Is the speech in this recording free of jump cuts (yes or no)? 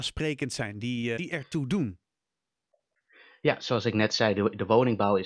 no